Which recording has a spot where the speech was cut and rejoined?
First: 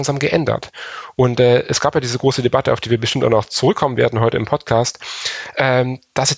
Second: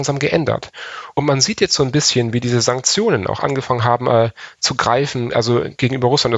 second; 1 cut; at 1.1 s

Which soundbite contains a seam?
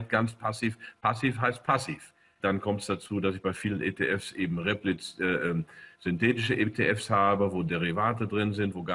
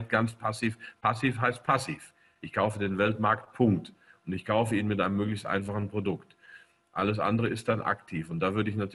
first; 1 cut; at 2.4 s

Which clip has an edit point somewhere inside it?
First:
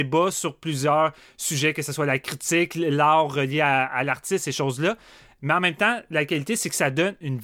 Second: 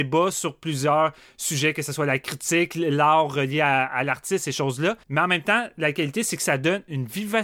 second; 1 cut; at 5.0 s

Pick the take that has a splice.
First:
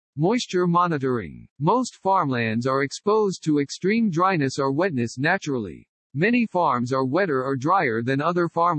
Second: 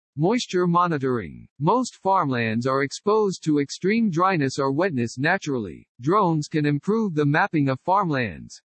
second; 1 cut; at 5.9 s

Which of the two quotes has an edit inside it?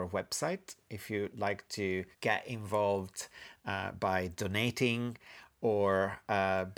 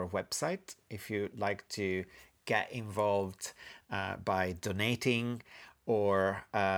first; 1 cut; at 2.1 s

